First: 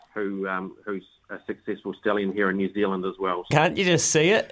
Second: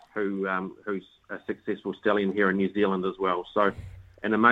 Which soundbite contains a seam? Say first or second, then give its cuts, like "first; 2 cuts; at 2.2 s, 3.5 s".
first; 1 cut; at 3.5 s